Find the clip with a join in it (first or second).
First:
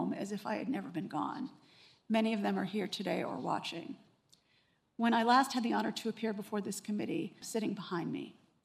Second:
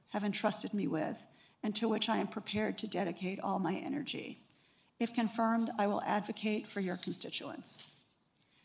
first